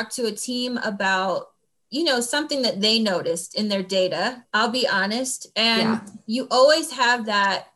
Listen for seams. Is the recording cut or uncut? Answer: cut